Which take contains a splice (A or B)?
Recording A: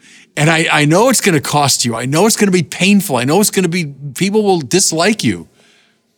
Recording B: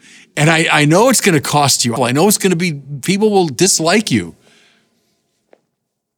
B